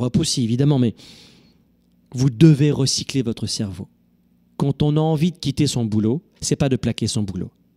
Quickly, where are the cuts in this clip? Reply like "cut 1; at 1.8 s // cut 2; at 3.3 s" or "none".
cut 1; at 6.4 s